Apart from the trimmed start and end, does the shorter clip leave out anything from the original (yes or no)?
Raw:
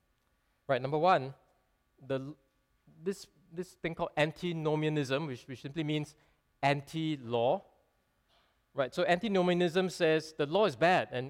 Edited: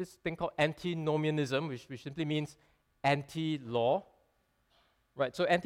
no